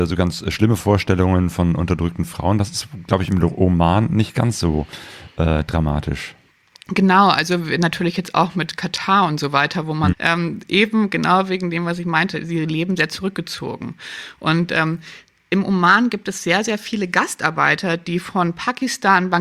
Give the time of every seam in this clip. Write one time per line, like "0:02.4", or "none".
0:10.1